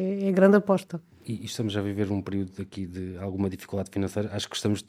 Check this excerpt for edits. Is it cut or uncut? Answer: uncut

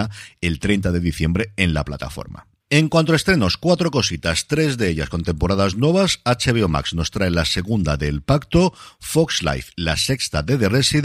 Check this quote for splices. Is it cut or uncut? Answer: uncut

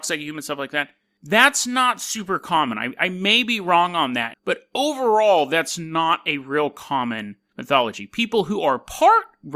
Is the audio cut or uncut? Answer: cut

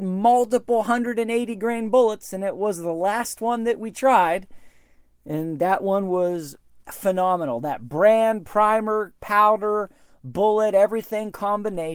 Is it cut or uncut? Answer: uncut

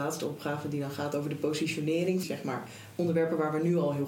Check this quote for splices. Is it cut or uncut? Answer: cut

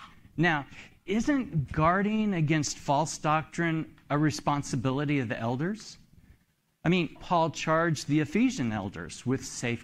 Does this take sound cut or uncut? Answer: cut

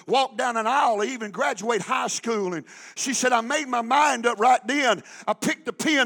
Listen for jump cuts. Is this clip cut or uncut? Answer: uncut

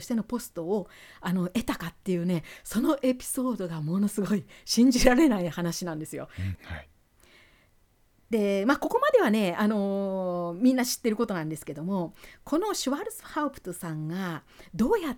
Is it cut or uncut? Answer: cut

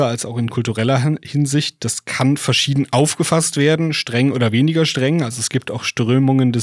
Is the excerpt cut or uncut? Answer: uncut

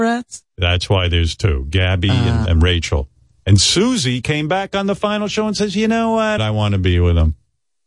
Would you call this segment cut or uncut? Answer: cut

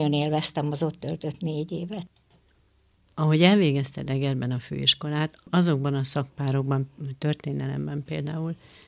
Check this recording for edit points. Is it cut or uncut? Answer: uncut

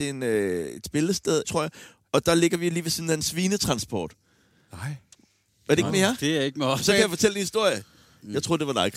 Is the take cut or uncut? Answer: cut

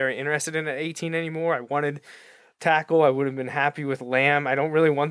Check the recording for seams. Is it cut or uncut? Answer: uncut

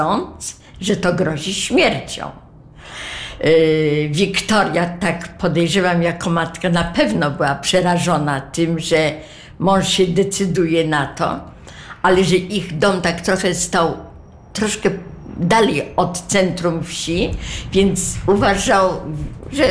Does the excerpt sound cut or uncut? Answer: uncut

